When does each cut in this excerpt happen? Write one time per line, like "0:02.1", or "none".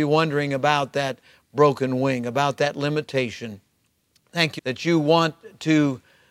0:04.6

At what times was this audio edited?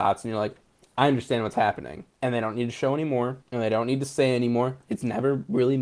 0:02.1
0:03.4

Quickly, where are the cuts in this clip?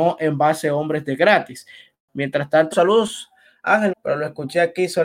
0:02.7
0:03.9

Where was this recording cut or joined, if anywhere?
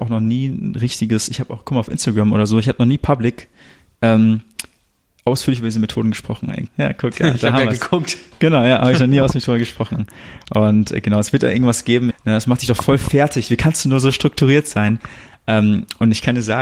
0:06.7
0:12.1

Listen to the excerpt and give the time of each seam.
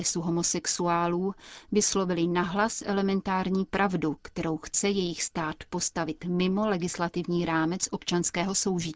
none

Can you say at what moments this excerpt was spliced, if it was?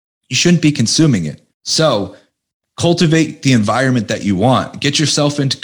0:01.5

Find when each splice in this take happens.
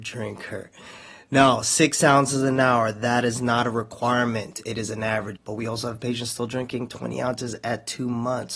0:05.4

